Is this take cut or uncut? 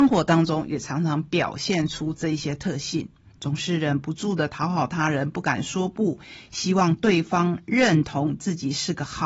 cut